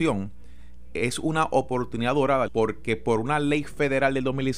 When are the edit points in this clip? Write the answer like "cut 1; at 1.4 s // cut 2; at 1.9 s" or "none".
cut 1; at 2.5 s